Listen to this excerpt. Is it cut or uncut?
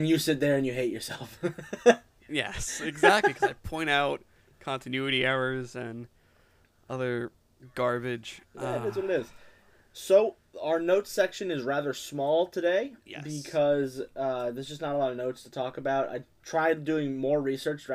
uncut